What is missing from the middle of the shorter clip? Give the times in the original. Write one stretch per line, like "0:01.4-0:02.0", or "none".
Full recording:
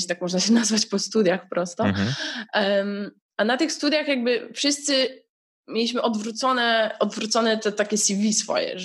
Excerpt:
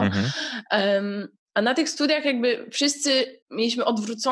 0:05.2-0:05.6